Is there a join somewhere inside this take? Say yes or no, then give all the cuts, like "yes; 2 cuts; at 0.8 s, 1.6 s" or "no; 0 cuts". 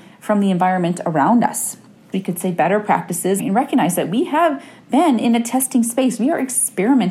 yes; 2 cuts; at 2.1 s, 3.4 s